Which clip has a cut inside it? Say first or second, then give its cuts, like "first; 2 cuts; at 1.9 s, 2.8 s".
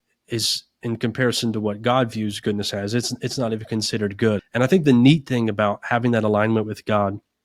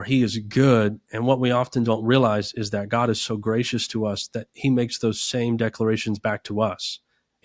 first; 1 cut; at 4.4 s